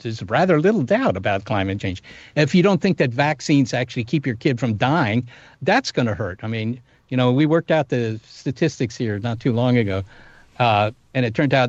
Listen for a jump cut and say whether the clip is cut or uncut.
cut